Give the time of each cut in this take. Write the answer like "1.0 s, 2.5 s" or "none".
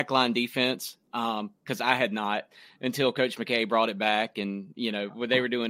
none

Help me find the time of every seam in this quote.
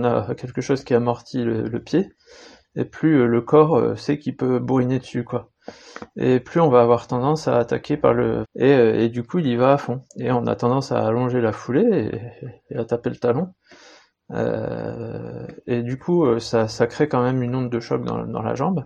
8.4 s, 10.1 s

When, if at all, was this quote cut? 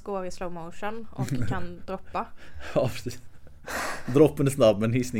none

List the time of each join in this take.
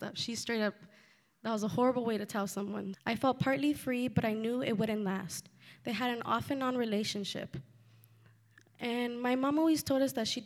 2.9 s

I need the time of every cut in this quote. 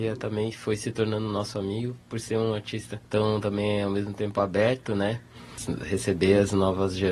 3.0 s

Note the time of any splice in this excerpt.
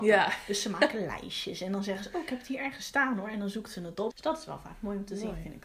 4.1 s

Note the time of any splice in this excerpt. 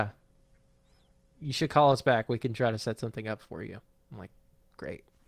none

